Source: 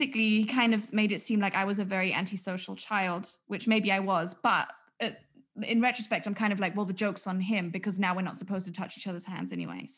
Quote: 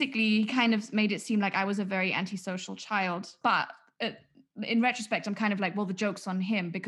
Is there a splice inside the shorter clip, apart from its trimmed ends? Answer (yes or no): yes